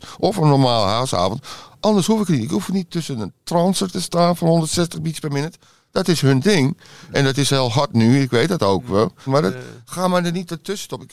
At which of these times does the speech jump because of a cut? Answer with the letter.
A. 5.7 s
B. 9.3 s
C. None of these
B